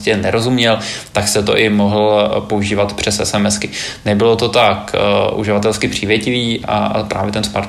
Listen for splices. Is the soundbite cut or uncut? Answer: uncut